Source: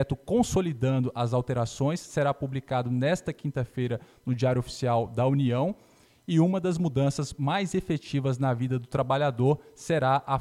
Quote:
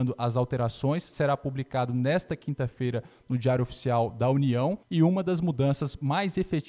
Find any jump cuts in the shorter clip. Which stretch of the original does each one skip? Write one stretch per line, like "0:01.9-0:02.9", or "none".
0:05.8-0:06.2

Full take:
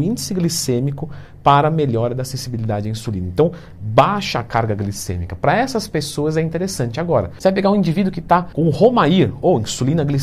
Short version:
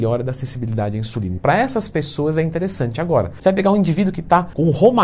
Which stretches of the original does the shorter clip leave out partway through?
0:03.3-0:05.4

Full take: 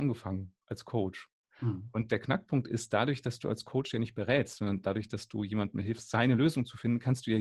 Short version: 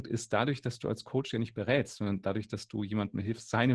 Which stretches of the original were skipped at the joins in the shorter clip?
none

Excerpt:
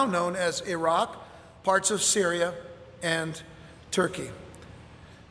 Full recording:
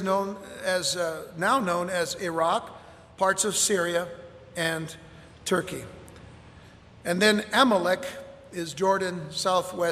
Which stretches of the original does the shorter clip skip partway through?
none

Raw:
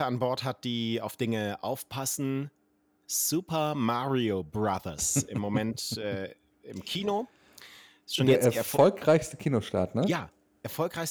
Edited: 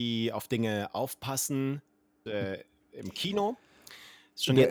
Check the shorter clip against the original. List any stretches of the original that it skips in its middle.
0:02.9-0:06.0

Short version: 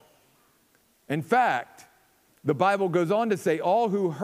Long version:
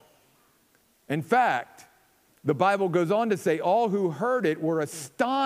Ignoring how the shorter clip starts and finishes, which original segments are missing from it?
none

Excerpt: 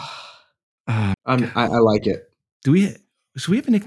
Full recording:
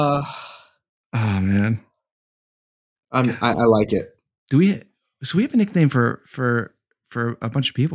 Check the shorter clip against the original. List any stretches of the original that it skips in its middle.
0:01.4-0:03.0

